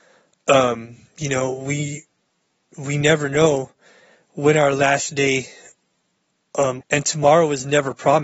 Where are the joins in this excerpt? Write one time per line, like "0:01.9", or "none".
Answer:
0:06.8

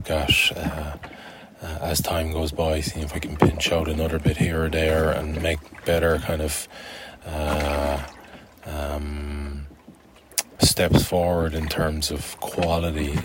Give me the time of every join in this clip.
0:10.6

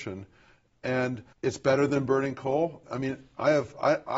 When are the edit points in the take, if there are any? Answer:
0:01.3
0:02.8

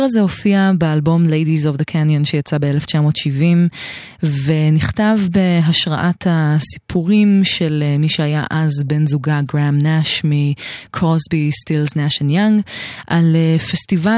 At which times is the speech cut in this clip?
none

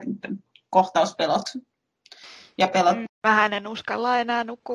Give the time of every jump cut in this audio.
0:03.0

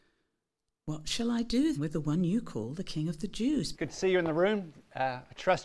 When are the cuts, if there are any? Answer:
0:01.8
0:03.7

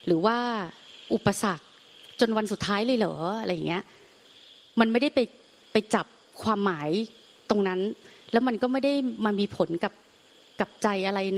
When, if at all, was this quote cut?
none

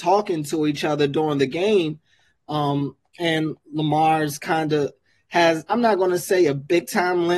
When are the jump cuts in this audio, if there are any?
none

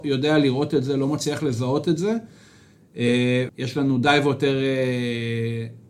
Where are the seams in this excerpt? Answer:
0:03.5

